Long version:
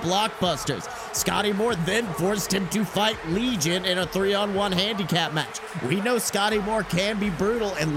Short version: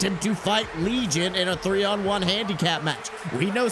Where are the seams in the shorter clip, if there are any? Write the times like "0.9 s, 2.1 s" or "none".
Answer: none